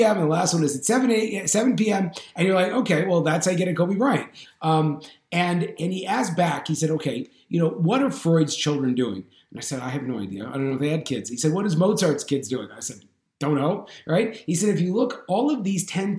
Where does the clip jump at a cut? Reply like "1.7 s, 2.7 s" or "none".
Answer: 4.4 s, 5.8 s